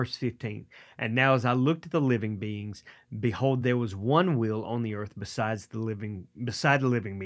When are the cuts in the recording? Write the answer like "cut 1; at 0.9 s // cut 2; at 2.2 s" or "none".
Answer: none